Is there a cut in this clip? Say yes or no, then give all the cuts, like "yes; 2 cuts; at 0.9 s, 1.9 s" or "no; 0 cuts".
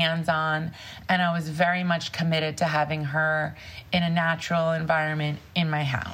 no; 0 cuts